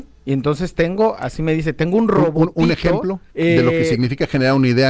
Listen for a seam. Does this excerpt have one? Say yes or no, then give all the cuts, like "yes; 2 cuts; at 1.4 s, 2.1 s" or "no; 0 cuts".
yes; 1 cut; at 3.3 s